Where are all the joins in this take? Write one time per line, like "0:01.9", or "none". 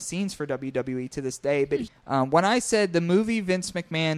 0:01.9